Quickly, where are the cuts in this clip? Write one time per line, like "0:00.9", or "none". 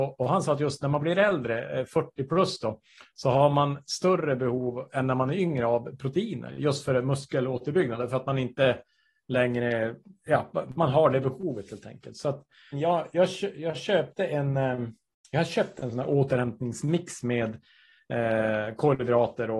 0:10.7
0:12.7